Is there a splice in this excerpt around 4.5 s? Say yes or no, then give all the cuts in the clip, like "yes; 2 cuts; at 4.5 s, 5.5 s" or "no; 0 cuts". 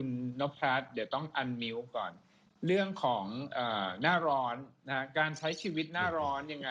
no; 0 cuts